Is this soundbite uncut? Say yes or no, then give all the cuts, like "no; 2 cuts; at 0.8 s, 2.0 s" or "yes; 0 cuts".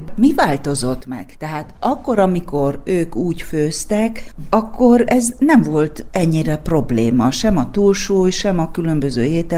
yes; 0 cuts